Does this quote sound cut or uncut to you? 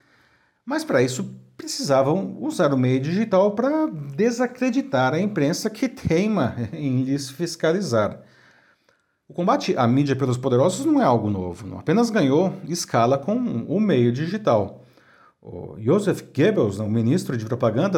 uncut